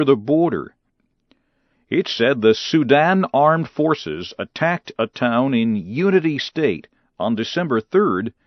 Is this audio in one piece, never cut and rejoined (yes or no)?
no